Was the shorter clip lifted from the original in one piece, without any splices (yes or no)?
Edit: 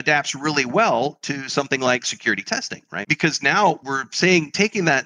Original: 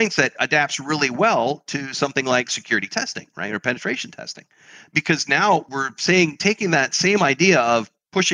no